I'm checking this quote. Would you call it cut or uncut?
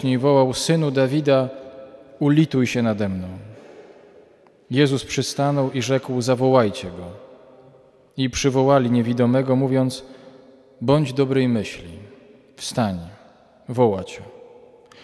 uncut